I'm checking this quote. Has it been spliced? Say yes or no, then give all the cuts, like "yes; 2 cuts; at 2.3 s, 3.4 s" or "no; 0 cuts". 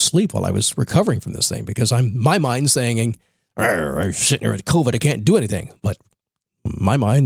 no; 0 cuts